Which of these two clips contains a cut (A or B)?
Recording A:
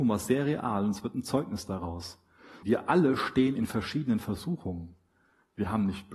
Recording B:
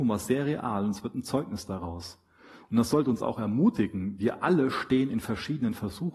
A